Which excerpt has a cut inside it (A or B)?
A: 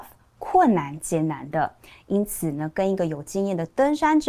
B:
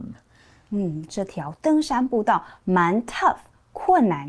B